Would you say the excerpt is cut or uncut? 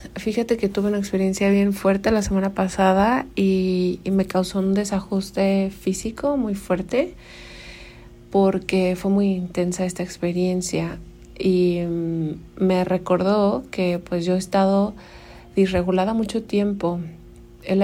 uncut